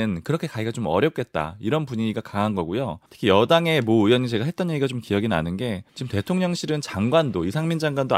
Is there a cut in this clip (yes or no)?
yes